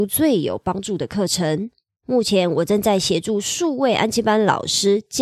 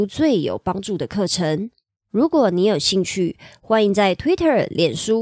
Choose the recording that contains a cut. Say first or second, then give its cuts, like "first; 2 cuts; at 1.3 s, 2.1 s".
first; 1 cut; at 2.0 s